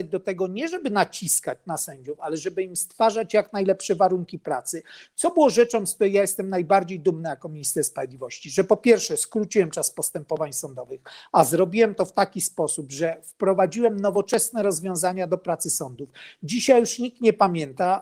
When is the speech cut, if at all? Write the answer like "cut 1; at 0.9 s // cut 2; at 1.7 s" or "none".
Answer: none